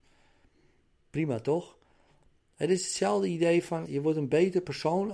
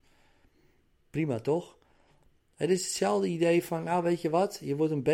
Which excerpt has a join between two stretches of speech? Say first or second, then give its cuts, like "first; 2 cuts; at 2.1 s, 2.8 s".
first; 1 cut; at 3.8 s